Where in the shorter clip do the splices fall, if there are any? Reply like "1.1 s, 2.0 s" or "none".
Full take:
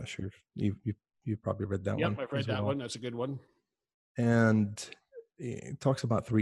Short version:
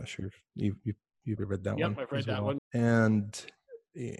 1.4 s, 2.6 s